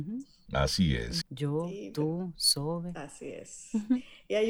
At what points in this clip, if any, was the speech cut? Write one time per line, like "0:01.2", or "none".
0:01.2